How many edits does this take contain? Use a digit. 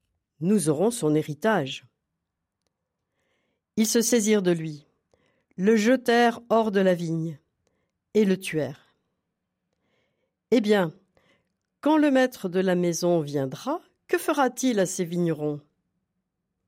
0